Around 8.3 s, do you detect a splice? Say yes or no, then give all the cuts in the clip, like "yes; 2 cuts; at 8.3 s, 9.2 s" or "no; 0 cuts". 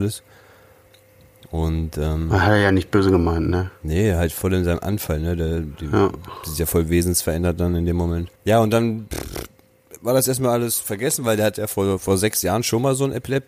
yes; 1 cut; at 8.3 s